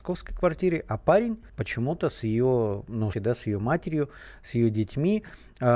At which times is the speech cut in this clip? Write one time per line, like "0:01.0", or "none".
0:01.5
0:03.1